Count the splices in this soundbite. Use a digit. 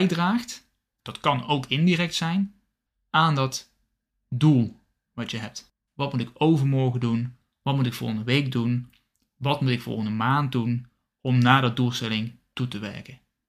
2